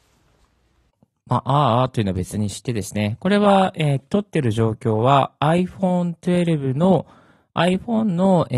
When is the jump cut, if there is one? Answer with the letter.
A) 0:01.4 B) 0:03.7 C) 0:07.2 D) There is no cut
D